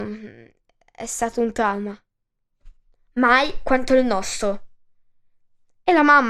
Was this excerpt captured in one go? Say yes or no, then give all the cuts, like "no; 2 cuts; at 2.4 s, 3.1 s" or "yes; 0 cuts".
yes; 0 cuts